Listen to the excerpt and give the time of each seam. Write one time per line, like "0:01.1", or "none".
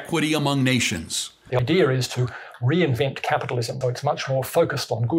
0:01.5
0:03.8